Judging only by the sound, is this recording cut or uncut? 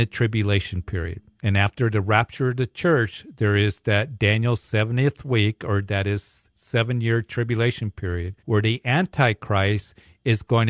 cut